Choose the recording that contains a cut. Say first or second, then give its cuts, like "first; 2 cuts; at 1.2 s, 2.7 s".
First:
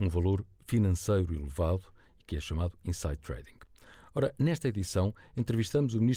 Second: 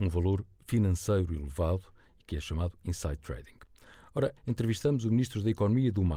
second; 1 cut; at 4.4 s